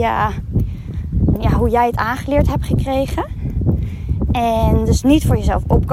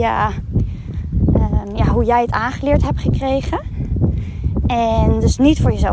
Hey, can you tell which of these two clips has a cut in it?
first; 1 cut; at 1.3 s

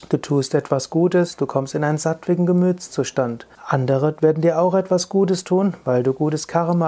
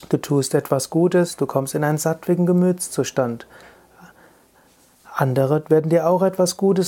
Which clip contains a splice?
first; 1 cut; at 3.6 s

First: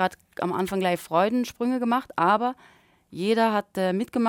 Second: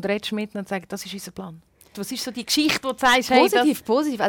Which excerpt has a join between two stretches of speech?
second; 1 cut; at 1.9 s

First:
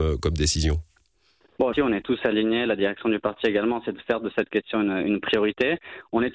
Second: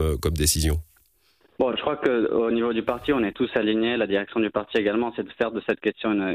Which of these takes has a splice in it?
first; 1 cut; at 1.7 s

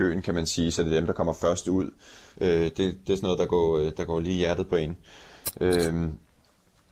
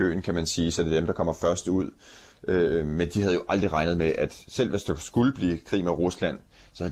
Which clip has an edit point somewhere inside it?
first; 1 cut; at 2.3 s

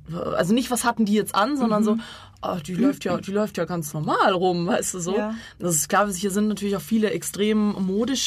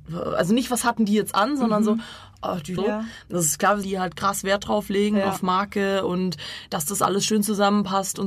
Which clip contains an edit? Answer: second; 2 cuts; at 2.8 s, 3.8 s

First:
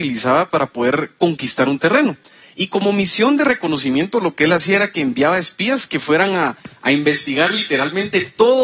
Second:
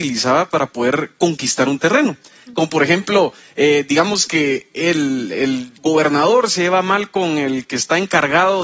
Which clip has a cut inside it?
second; 2 cuts; at 2.4 s, 5.8 s

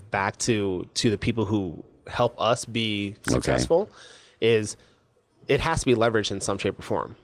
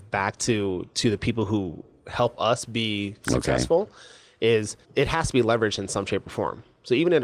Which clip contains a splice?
second; 1 cut; at 4.8 s

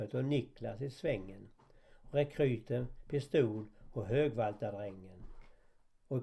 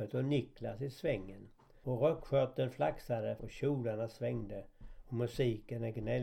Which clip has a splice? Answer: second; 2 cuts; at 1.8 s, 3.4 s

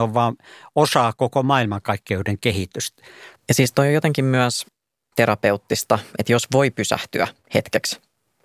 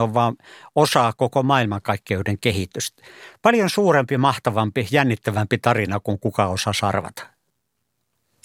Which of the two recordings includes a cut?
first; 1 cut; at 3.4 s

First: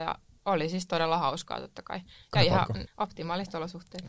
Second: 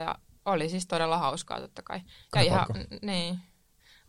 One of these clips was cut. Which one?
first; 1 cut; at 2.9 s

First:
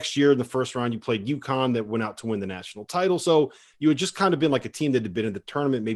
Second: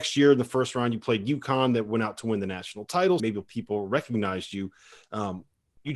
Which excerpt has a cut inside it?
second; 1 cut; at 3.2 s

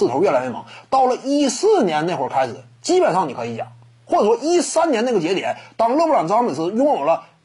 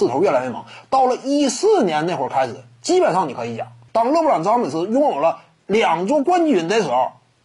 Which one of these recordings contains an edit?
second; 1 cut; at 3.9 s

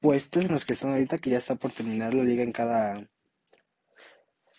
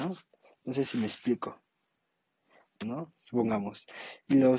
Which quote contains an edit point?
second; 1 cut; at 2.8 s

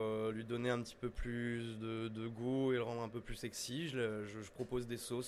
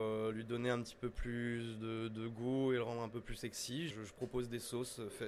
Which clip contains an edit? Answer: second; 1 cut; at 3.9 s

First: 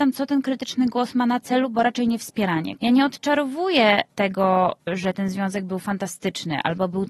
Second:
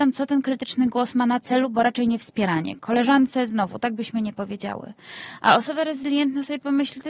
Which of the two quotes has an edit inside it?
first; 1 cut; at 2.8 s

